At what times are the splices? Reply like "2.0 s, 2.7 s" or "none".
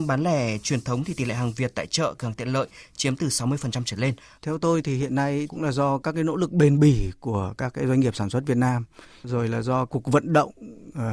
4.3 s